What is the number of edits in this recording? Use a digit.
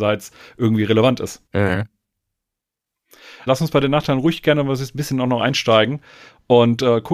2